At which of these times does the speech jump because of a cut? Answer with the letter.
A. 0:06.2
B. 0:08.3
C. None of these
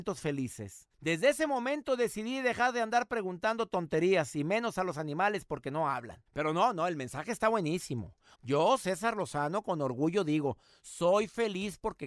B